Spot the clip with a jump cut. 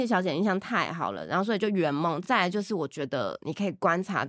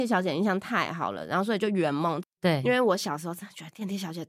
second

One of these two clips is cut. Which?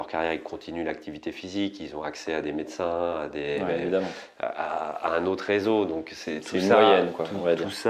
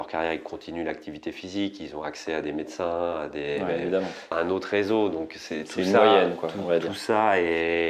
second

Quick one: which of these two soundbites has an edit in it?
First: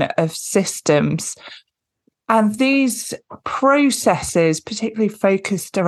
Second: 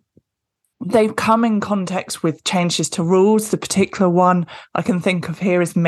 first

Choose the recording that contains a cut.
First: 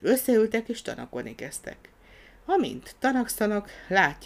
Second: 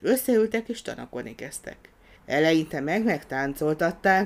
second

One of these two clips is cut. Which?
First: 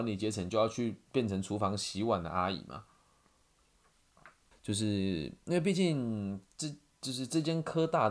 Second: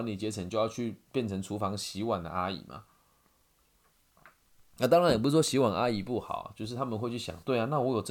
first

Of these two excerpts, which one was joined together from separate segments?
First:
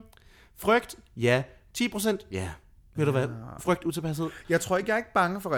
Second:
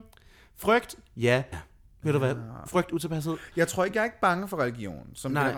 second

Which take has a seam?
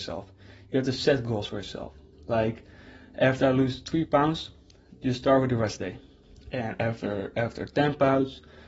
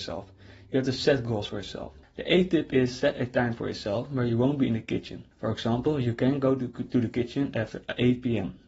second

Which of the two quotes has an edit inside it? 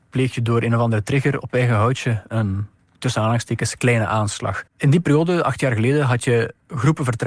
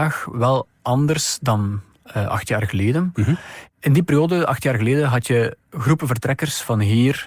first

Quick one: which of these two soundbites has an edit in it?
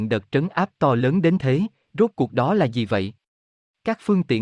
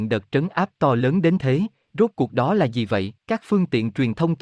second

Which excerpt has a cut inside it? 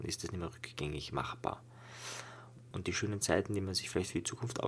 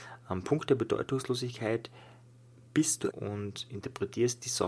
second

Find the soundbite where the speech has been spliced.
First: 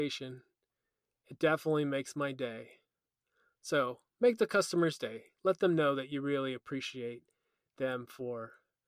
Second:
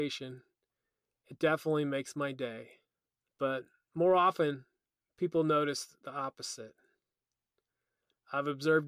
second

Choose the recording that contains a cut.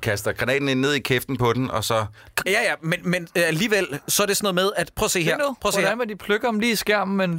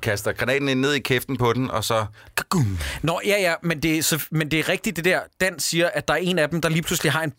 first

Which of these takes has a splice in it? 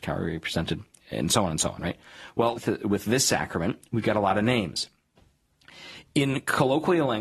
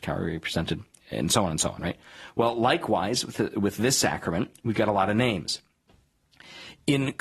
first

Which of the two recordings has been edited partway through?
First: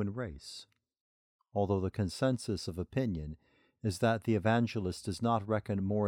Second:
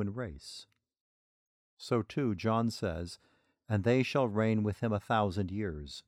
first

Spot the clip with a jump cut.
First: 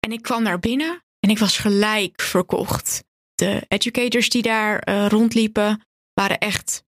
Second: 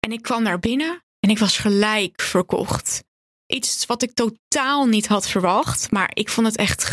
first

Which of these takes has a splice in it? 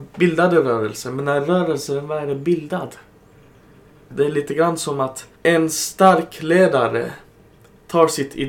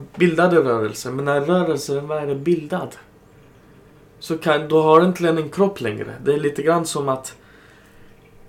first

